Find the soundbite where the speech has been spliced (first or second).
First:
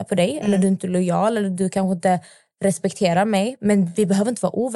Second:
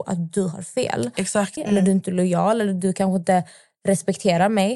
second